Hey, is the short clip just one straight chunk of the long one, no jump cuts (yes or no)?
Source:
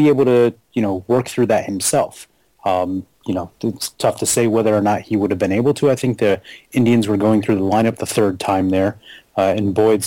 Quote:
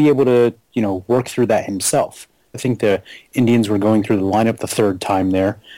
no